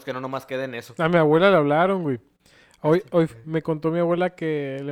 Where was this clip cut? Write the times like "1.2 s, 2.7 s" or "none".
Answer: 3.4 s